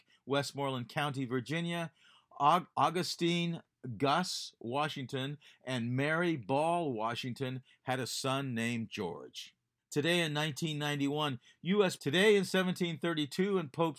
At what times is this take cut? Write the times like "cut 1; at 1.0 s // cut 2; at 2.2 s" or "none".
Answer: cut 1; at 2.7 s // cut 2; at 9.8 s // cut 3; at 12.0 s